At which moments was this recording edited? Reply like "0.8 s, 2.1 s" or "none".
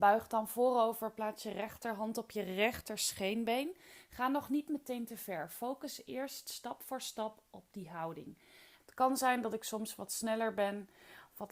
8.8 s